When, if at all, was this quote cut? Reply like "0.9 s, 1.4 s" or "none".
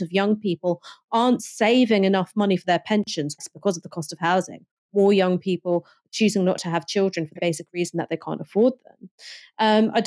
3.4 s, 7.4 s